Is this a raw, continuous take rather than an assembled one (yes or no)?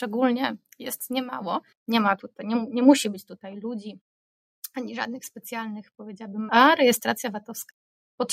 no